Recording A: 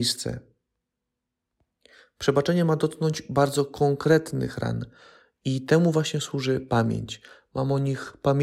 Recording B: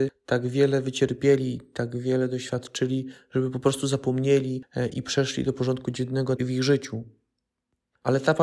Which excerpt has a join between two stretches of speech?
B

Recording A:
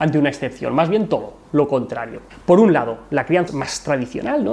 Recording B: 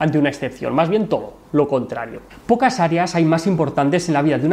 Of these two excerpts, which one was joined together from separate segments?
A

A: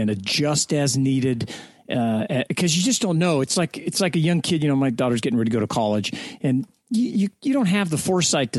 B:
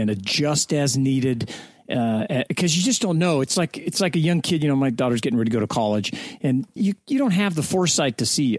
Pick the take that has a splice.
B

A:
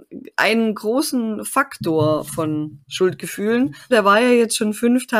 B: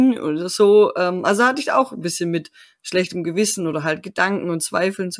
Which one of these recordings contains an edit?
A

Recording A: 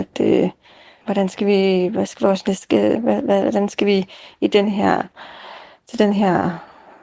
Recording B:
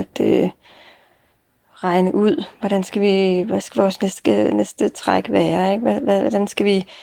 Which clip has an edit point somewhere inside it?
A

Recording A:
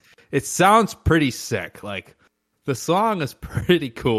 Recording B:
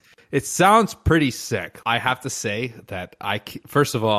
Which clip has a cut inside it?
B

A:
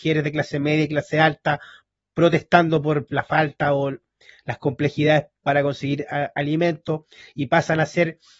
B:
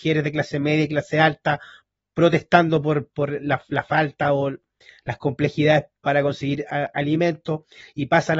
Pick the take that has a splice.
A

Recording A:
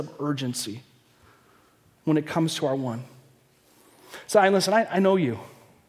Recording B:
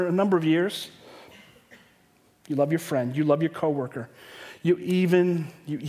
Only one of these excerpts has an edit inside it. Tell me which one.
B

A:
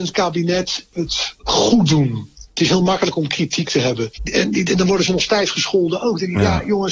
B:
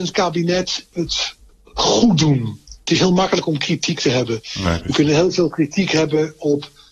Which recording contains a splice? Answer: A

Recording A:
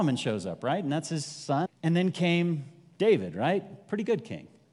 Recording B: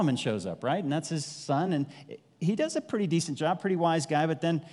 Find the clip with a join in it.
A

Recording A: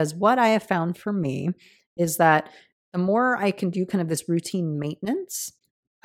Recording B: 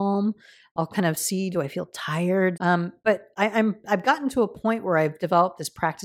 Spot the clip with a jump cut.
B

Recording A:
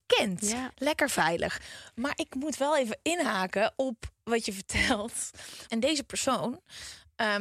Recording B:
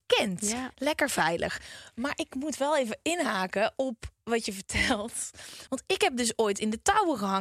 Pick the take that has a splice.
A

